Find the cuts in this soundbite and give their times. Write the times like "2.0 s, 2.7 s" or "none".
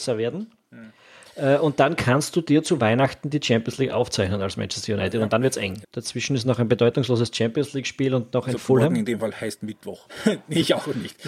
5.8 s, 10.1 s